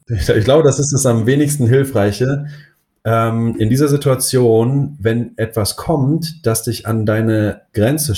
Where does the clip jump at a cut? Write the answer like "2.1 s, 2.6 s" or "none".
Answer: none